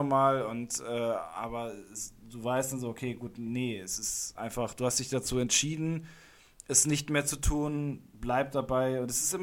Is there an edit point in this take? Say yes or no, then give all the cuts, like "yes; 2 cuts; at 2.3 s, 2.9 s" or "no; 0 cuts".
no; 0 cuts